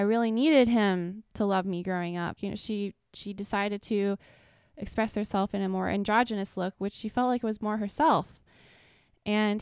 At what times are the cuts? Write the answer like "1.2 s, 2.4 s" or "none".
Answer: 2.4 s

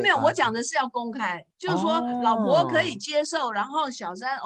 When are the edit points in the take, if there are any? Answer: 1.5 s

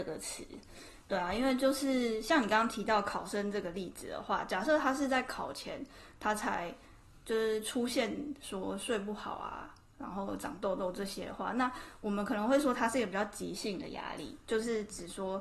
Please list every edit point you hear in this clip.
none

